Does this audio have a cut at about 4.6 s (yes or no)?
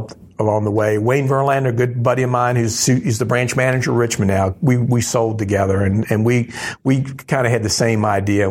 no